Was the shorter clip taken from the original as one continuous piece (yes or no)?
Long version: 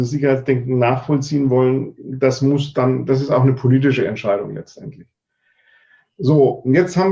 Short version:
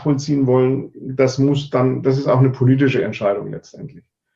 yes